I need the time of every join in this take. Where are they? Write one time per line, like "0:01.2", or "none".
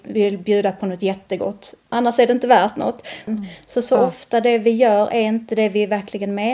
0:01.9
0:03.3